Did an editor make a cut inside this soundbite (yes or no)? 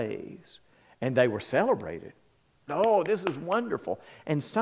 yes